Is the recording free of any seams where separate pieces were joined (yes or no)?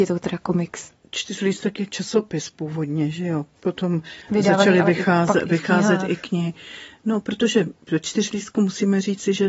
yes